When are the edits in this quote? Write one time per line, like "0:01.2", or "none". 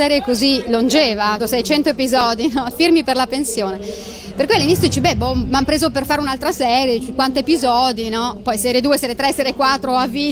0:01.4
0:02.7